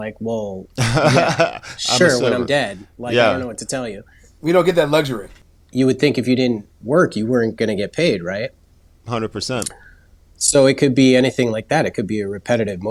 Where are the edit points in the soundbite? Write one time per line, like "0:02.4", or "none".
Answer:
none

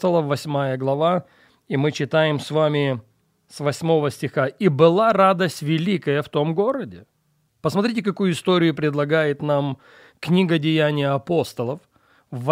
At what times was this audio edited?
0:07.5

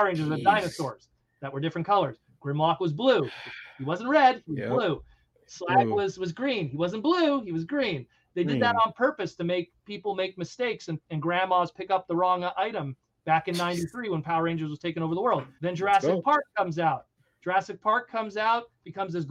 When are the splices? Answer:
0:15.6

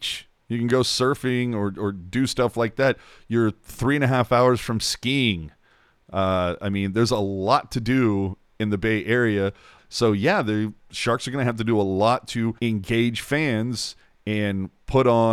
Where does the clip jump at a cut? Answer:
0:09.8
0:12.6

